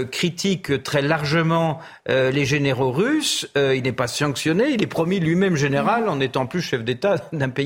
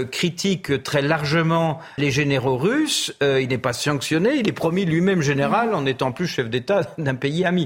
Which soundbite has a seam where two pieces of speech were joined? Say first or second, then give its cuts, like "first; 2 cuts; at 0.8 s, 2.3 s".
second; 1 cut; at 2.0 s